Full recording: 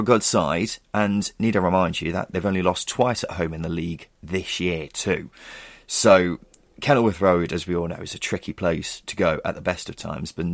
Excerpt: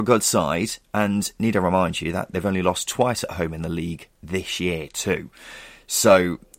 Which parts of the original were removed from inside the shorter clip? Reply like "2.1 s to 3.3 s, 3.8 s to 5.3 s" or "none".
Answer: none